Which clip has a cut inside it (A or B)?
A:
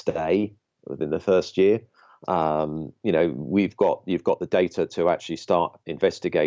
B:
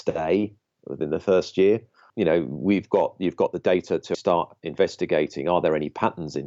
B